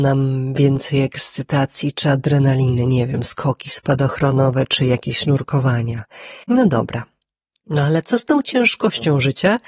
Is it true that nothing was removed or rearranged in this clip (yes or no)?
no